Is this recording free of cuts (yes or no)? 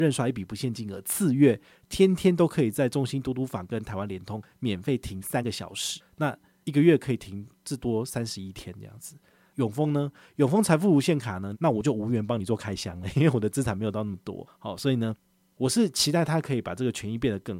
no